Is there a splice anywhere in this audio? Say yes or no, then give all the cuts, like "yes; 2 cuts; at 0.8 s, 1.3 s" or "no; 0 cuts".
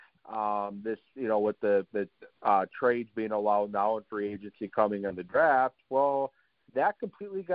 yes; 1 cut; at 2.3 s